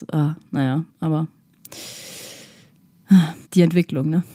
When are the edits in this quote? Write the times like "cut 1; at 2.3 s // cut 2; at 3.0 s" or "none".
cut 1; at 3.4 s